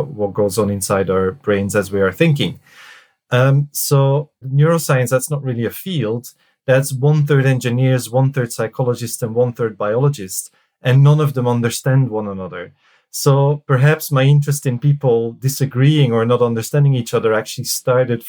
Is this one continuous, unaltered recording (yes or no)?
no